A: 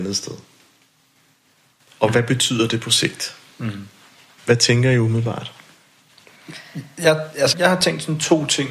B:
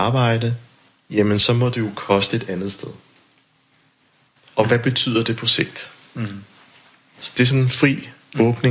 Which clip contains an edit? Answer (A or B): A